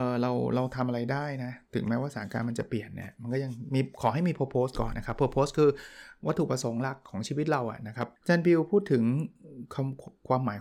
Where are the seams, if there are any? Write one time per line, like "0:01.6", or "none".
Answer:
0:04.9
0:08.2